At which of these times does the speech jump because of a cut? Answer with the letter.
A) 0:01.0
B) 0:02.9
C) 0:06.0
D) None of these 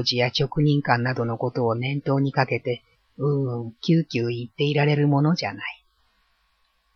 D